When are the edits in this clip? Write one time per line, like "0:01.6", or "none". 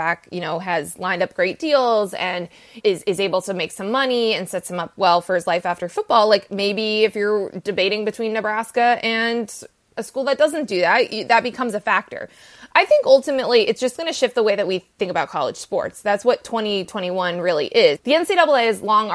0:02.8
0:18.0